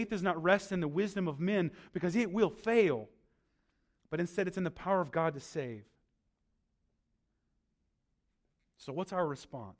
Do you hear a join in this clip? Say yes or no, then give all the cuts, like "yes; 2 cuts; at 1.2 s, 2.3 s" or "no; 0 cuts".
no; 0 cuts